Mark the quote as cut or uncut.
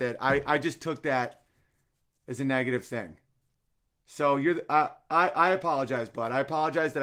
uncut